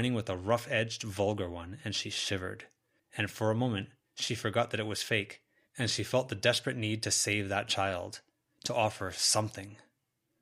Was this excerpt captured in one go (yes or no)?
no